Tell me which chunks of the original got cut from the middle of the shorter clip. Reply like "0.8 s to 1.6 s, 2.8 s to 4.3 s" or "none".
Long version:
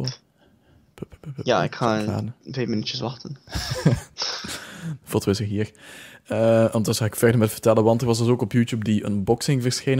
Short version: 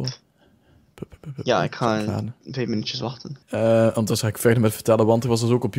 3.4 s to 6.2 s